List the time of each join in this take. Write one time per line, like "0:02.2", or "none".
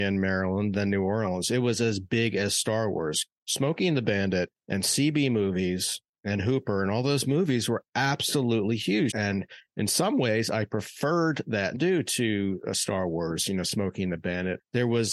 0:09.1
0:11.7